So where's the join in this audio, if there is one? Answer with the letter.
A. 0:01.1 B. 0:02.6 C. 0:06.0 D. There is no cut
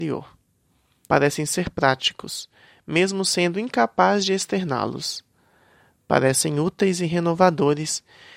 A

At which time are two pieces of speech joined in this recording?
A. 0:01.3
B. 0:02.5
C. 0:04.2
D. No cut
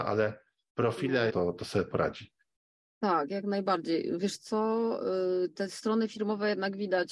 A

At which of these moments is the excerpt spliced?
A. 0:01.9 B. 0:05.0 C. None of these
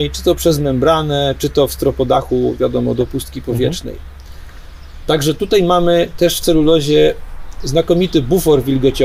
C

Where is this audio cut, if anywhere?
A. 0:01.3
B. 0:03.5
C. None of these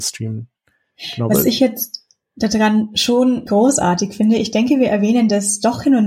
B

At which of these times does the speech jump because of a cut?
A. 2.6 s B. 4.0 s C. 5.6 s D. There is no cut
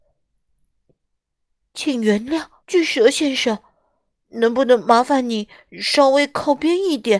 A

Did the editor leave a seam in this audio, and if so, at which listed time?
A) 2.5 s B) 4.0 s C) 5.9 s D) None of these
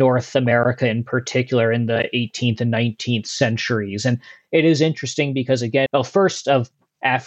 C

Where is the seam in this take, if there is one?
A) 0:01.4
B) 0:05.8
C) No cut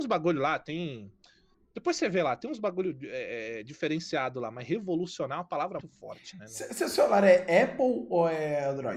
B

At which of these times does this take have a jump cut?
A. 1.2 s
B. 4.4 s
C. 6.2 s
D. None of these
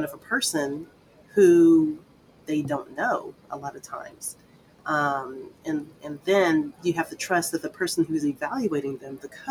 D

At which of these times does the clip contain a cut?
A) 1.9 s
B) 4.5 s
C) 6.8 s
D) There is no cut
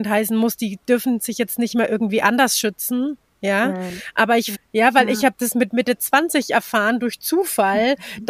B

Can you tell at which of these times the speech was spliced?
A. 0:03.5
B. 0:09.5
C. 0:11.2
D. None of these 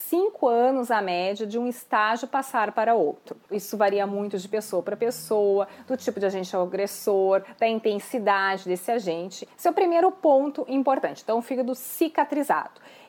A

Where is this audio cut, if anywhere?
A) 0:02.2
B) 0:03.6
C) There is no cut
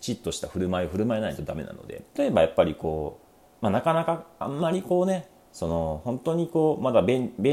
A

